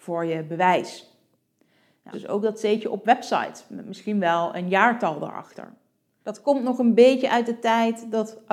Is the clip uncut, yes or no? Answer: no